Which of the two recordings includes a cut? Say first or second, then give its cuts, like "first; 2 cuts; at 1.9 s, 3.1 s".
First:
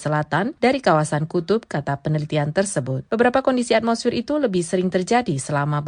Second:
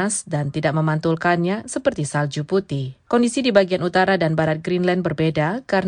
first; 1 cut; at 3.1 s